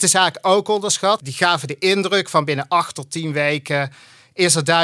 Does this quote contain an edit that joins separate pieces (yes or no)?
no